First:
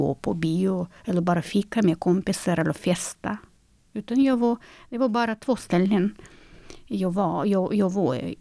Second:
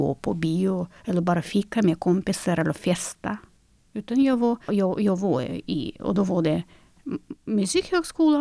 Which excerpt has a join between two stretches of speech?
second; 1 cut; at 4.7 s

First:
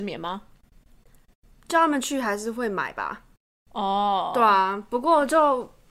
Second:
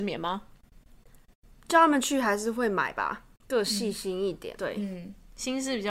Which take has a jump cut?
second; 2 cuts; at 3.4 s, 4.6 s

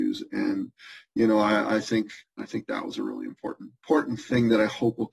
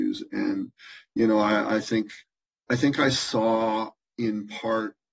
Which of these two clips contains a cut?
first; 2 cuts; at 2.4 s, 3.8 s

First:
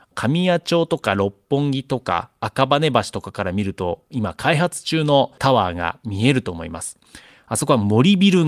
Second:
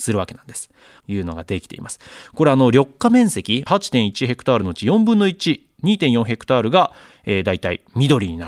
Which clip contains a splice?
second; 2 cuts; at 1.0 s, 3.7 s

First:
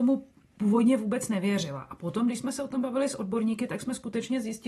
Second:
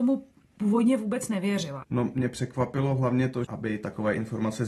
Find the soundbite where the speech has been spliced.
second; 2 cuts; at 1.8 s, 3.4 s

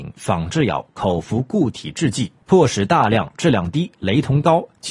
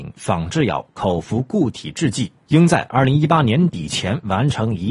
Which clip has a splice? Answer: first; 1 cut; at 2.4 s

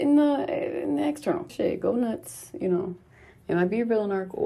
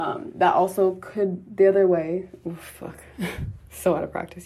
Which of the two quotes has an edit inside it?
first; 1 cut; at 1.5 s

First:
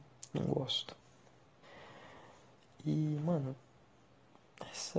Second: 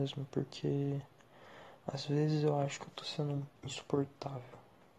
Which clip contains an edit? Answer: second; 1 cut; at 3.6 s

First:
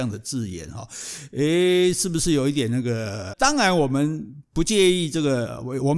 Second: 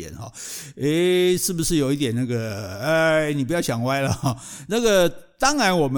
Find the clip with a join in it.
first; 2 cuts; at 3.3 s, 4.4 s

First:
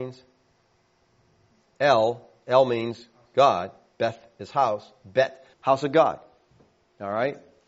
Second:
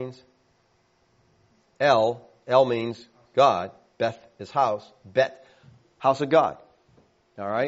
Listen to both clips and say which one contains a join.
first; 1 cut; at 5.5 s

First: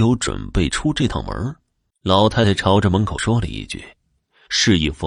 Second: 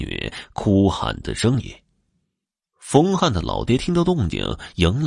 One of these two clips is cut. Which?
first; 1 cut; at 1.9 s

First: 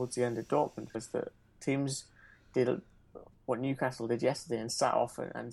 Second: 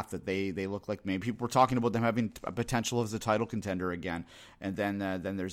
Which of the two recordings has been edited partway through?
first; 1 cut; at 0.9 s

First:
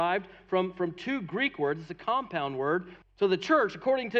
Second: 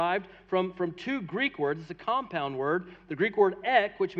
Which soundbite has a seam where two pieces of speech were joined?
first; 1 cut; at 3.0 s

